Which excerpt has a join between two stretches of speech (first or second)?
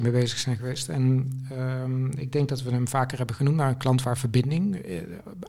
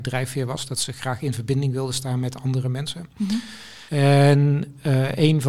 second